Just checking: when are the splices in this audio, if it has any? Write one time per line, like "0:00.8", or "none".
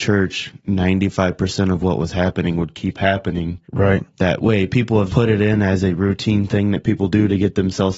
0:03.6
0:05.1